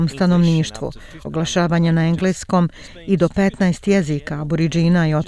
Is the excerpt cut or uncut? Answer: cut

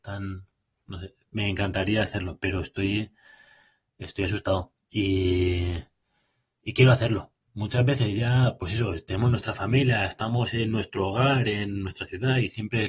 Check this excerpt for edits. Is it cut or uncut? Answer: cut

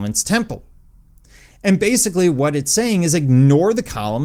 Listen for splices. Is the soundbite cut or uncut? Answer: uncut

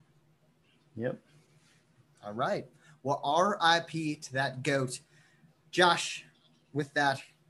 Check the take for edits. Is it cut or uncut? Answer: uncut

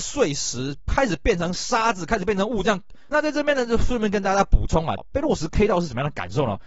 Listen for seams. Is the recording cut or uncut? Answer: cut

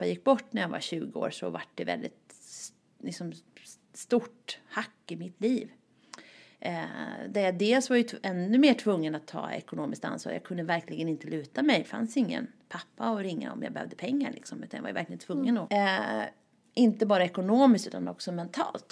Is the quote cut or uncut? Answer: cut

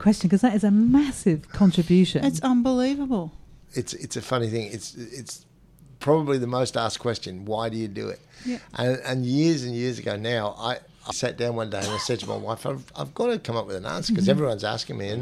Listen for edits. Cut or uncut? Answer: cut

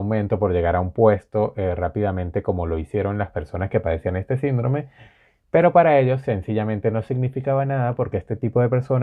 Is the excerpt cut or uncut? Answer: uncut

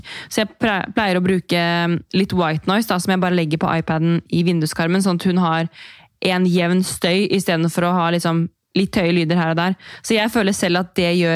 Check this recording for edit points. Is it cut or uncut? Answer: uncut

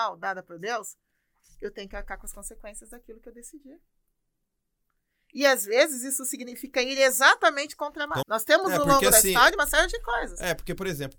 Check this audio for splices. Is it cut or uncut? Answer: cut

